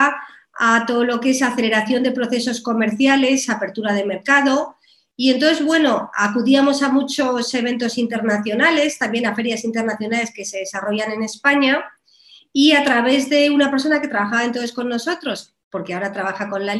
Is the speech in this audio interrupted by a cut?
no; 0 cuts

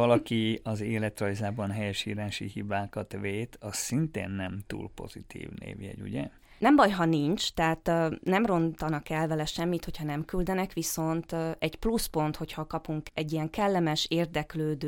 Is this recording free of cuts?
no; 1 cut; at 6.6 s

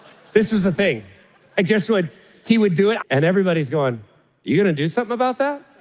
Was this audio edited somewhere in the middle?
yes; 1 cut; at 3.0 s

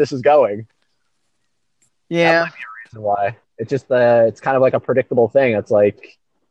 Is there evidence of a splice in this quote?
no; 0 cuts

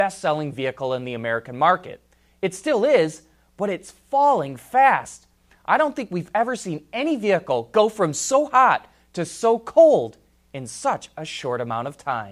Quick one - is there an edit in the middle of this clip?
no; 0 cuts

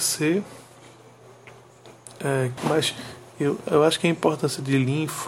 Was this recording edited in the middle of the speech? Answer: yes; 1 cut; at 2.6 s

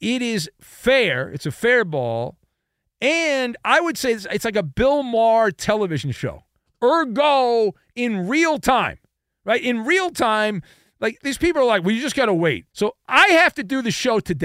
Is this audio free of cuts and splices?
no; 2 cuts; at 11.2 s, 12.7 s

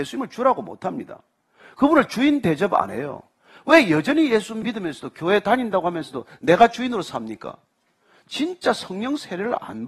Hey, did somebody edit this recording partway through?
no; 0 cuts

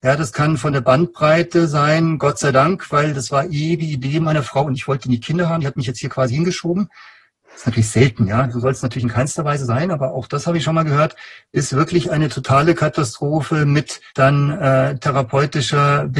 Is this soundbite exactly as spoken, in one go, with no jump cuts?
no; 1 cut; at 14.1 s

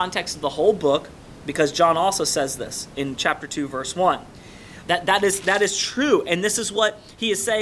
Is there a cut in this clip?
yes; 1 cut; at 4.8 s

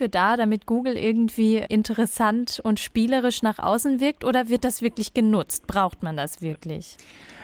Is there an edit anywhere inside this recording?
no; 0 cuts

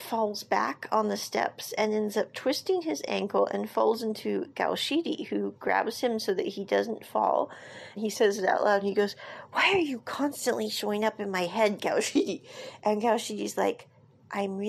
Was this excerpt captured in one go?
no; 1 cut; at 7.9 s

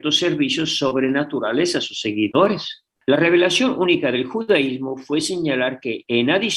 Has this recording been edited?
yes; 1 cut; at 3.0 s

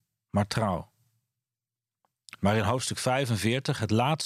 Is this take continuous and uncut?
yes; 0 cuts

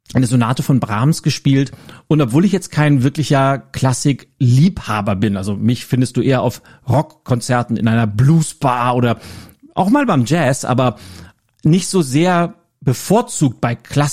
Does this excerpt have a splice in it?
no; 0 cuts

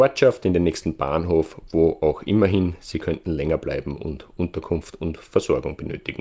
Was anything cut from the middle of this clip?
no; 0 cuts

